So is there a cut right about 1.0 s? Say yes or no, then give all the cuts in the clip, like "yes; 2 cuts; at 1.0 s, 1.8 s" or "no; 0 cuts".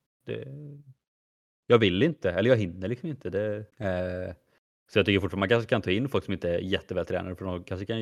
no; 1 cut; at 3.7 s